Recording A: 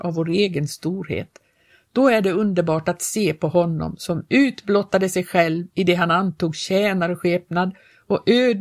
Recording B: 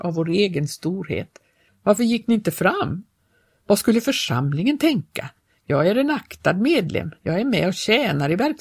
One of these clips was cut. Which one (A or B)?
B